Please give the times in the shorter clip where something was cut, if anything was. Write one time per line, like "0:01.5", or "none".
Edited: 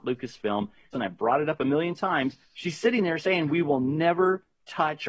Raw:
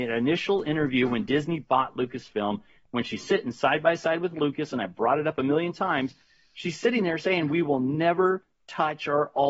0:00.9
0:02.4

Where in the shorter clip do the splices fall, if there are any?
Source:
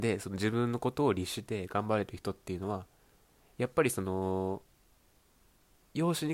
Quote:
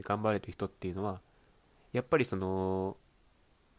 none

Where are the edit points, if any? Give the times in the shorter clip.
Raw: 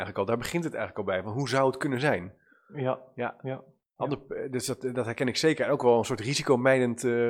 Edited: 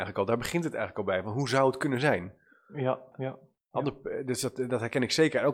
0:03.1

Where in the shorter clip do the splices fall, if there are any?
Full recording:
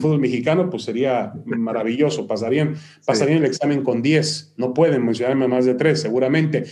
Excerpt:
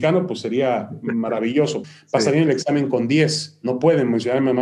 0:01.8

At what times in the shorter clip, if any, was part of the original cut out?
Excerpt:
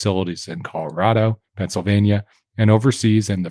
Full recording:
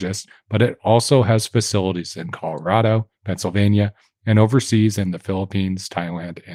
none

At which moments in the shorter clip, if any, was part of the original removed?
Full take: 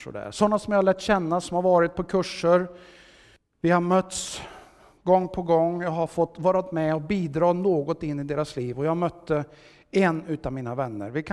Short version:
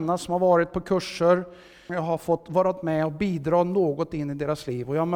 0:01.9

